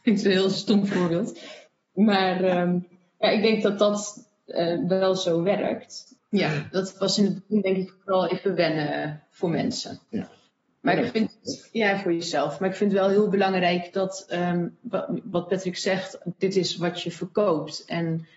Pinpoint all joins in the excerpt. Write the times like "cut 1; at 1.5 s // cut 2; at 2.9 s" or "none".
cut 1; at 6.2 s